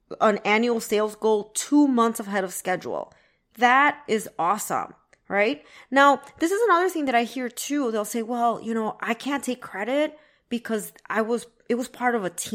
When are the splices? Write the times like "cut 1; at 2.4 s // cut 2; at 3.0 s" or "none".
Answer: none